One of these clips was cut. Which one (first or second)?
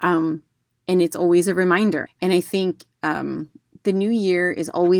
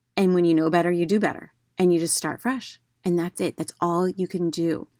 first